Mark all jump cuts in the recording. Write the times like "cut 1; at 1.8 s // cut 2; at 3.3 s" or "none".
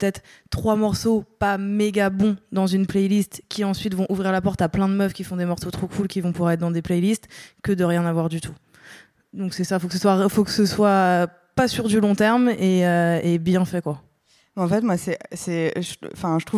none

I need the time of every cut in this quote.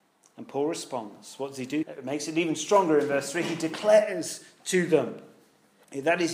cut 1; at 1.8 s

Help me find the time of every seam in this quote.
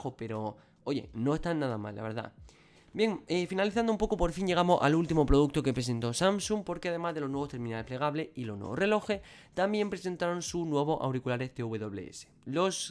none

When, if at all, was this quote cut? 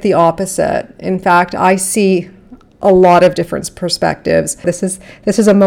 cut 1; at 4.6 s

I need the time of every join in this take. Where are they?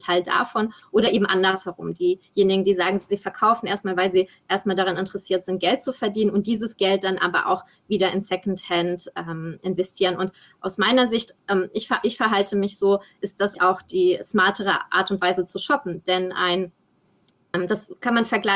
cut 1; at 13.5 s

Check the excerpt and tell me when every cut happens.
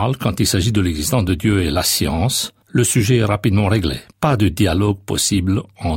cut 1; at 4.1 s

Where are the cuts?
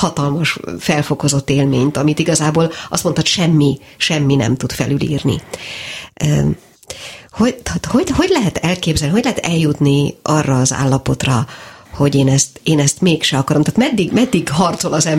none

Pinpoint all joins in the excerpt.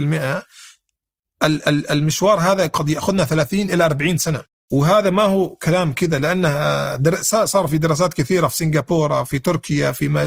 cut 1; at 4.6 s

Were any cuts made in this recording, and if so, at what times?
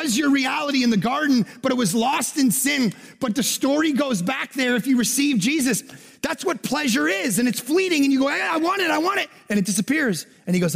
none

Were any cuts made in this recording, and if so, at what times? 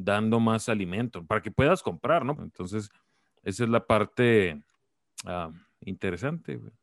cut 1; at 2.4 s

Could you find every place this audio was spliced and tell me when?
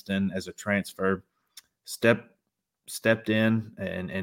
none

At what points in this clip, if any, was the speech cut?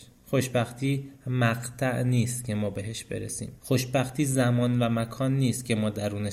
cut 1; at 3.6 s

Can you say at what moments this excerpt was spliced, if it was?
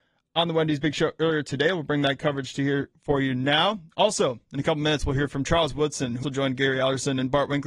cut 1; at 6.2 s

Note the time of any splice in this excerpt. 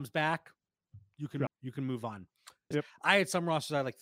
cut 1; at 1.5 s // cut 2; at 2.7 s

